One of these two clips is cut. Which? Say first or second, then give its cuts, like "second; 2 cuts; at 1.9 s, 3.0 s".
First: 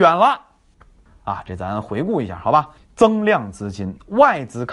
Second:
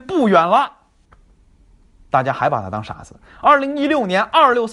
first; 2 cuts; at 1.1 s, 2.8 s